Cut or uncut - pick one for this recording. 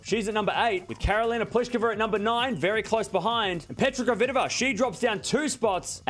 uncut